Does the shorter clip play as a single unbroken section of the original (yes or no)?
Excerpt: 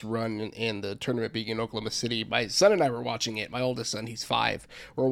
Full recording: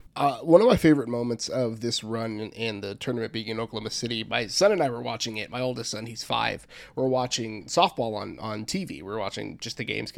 yes